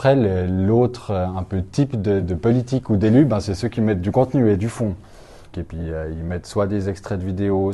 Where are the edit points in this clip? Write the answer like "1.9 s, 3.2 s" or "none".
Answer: 2.2 s, 5.5 s